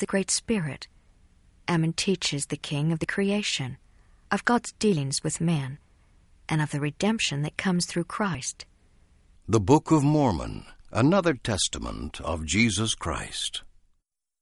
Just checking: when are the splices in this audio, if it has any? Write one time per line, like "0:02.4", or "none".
0:09.4
0:10.8